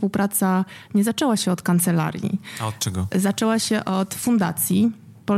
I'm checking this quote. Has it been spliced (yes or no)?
no